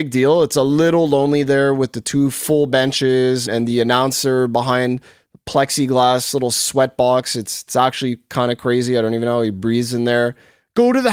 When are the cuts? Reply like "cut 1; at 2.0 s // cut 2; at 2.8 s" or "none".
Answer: cut 1; at 3.5 s

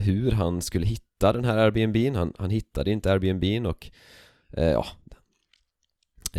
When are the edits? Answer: none

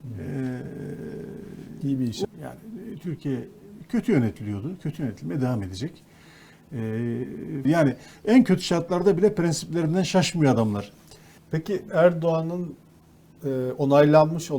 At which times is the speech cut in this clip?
cut 1; at 2.2 s // cut 2; at 7.6 s // cut 3; at 11.4 s

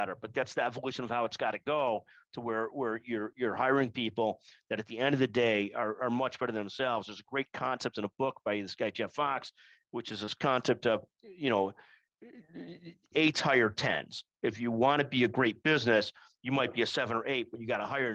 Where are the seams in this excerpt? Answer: none

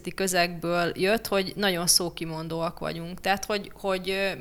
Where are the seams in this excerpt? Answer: none

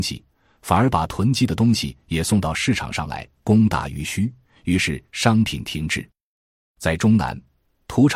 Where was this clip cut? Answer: cut 1; at 6.6 s

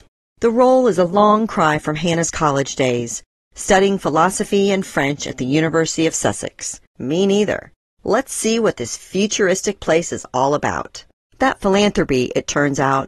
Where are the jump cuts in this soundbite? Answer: cut 1; at 6.9 s // cut 2; at 11.3 s

